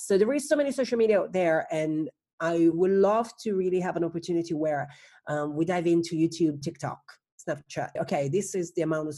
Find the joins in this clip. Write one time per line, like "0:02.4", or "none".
0:06.6
0:08.0